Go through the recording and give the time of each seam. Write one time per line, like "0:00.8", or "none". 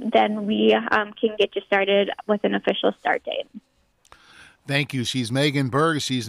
none